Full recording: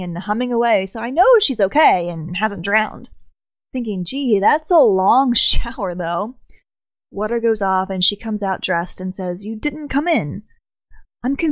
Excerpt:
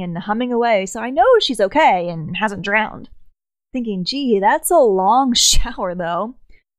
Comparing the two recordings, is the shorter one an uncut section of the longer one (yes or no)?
yes